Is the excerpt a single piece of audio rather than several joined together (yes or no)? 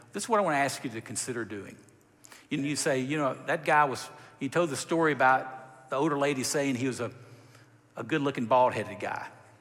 no